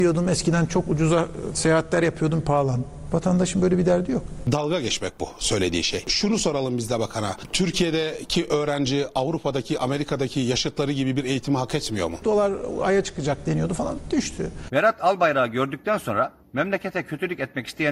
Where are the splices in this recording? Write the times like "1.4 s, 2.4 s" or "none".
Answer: 12.2 s